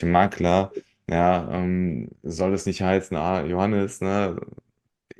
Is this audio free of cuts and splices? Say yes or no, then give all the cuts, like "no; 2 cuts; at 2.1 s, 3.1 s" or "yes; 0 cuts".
yes; 0 cuts